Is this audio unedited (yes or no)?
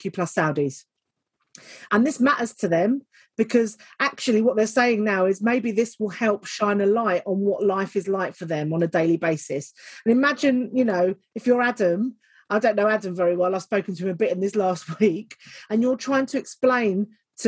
yes